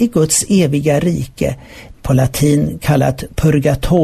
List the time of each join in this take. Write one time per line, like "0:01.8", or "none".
0:01.9